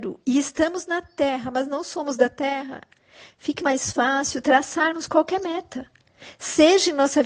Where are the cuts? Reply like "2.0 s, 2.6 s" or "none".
3.6 s